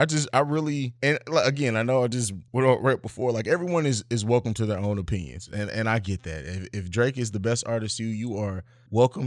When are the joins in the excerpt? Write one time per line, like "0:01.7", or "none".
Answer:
none